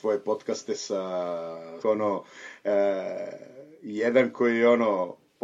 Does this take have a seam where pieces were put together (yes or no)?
yes